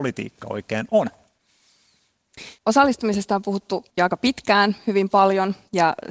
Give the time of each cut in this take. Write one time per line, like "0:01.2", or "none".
0:02.6
0:03.9